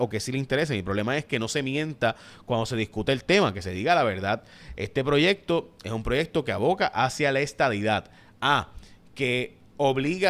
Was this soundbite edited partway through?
no; 0 cuts

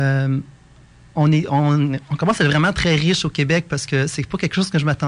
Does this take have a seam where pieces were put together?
no; 0 cuts

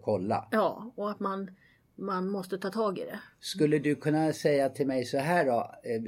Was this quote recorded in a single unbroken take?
yes; 0 cuts

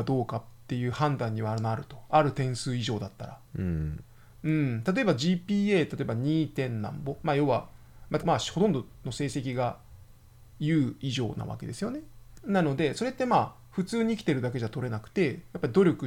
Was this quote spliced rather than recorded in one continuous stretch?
yes; 3 cuts; at 3.5 s, 8.2 s, 12.4 s

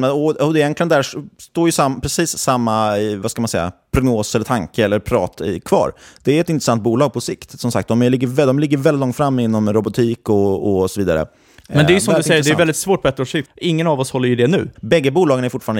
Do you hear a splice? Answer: yes; 2 cuts; at 13.5 s, 14.8 s

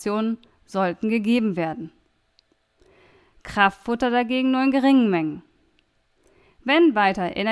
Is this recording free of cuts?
yes; 0 cuts

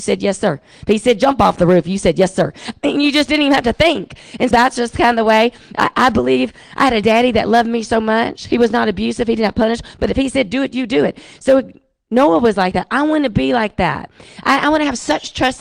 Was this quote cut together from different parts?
yes; 1 cut; at 4.5 s

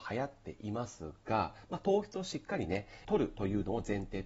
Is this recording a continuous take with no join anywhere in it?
no; 1 cut; at 3.0 s

